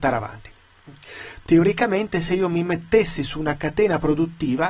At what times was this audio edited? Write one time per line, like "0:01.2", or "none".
0:01.4